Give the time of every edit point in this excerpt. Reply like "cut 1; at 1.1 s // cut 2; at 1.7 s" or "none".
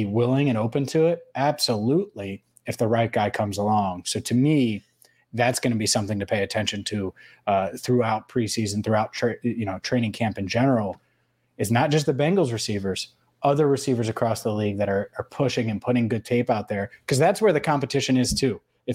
none